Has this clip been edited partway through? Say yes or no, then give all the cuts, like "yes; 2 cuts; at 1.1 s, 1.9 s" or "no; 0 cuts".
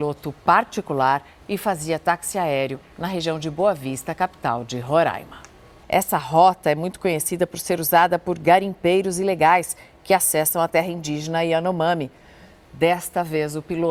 yes; 1 cut; at 5.8 s